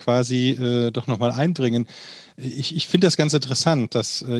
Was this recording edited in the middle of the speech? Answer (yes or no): no